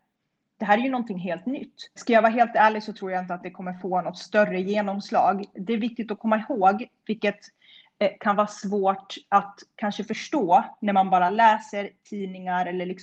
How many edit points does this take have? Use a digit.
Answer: 1